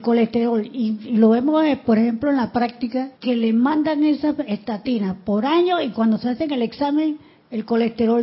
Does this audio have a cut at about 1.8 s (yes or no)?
no